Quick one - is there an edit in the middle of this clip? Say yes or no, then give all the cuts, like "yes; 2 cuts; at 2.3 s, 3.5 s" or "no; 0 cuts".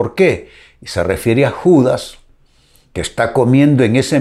no; 0 cuts